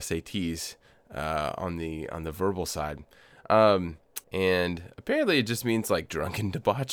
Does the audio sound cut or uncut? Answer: cut